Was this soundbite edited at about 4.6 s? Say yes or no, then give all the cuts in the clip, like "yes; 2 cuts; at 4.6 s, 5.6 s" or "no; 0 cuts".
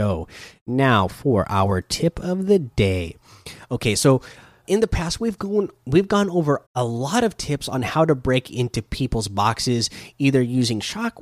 yes; 2 cuts; at 4.6 s, 6.6 s